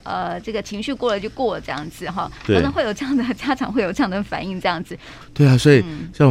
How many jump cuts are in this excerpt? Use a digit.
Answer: 1